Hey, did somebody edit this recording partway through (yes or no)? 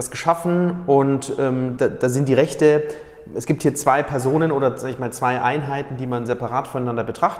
yes